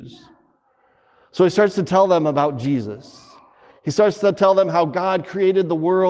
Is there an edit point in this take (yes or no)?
no